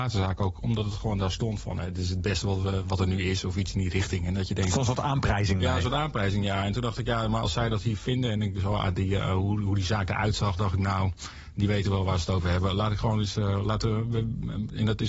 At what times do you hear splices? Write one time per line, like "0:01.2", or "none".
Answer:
none

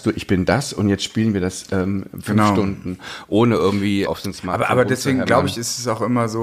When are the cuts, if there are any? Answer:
0:04.1

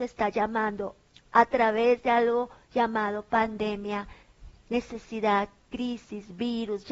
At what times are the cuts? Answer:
none

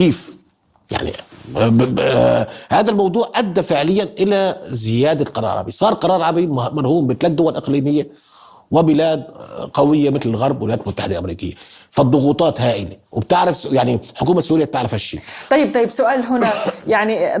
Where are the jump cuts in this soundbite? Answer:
none

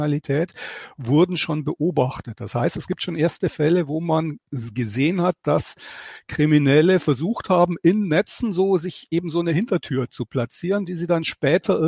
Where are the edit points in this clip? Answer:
none

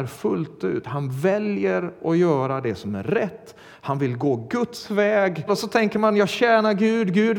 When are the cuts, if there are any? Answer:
0:05.5

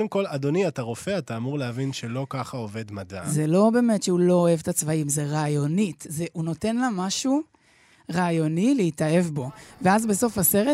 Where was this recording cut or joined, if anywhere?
none

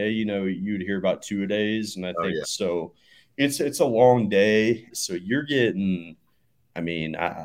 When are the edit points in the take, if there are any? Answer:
0:02.4
0:04.9

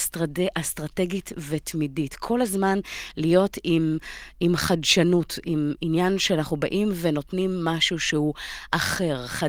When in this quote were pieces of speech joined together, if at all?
none

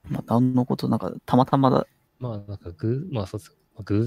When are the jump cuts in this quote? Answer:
0:02.1

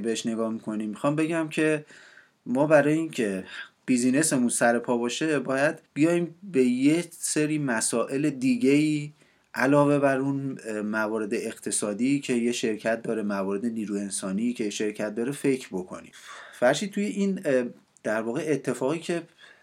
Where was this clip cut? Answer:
0:05.9

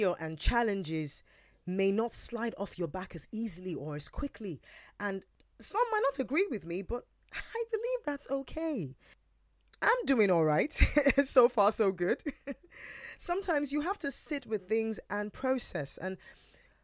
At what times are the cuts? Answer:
none

